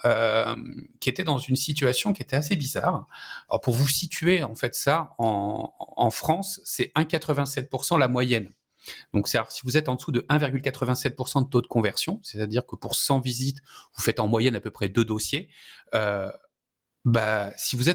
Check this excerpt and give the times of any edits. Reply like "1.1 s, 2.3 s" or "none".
3.5 s